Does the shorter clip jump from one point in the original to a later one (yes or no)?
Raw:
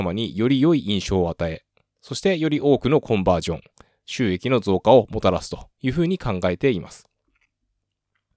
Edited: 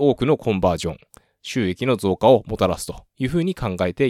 no